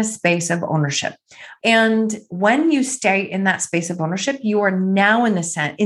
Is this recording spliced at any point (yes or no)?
yes